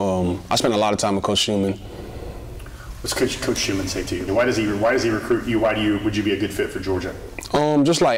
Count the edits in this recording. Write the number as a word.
one